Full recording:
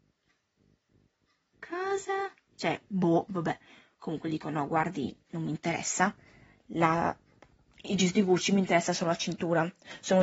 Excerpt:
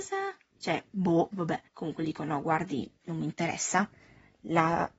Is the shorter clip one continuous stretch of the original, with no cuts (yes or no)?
no